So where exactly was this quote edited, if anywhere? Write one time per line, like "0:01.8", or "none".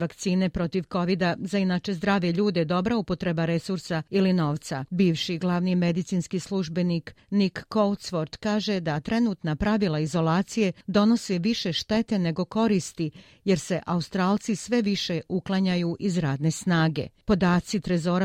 0:04.9